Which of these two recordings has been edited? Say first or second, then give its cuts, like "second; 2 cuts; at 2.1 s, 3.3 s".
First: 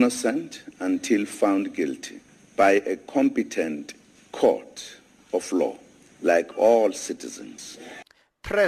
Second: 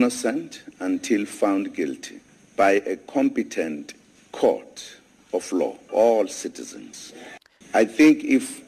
second; 2 cuts; at 5.9 s, 7.6 s